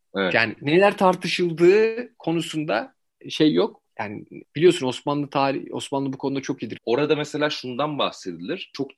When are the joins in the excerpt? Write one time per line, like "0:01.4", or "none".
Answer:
0:06.8